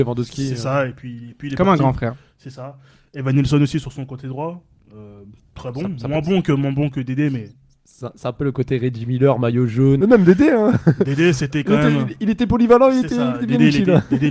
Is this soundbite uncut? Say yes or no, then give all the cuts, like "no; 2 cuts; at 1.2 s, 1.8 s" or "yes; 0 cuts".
no; 1 cut; at 10.0 s